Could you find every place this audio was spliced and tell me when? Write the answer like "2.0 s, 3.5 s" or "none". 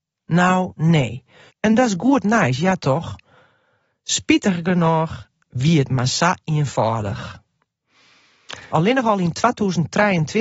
1.5 s, 8.7 s